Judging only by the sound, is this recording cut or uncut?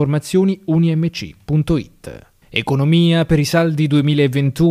cut